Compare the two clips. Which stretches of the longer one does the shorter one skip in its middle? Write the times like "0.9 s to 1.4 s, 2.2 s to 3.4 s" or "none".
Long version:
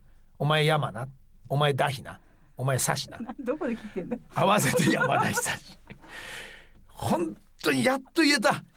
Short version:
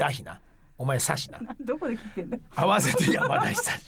none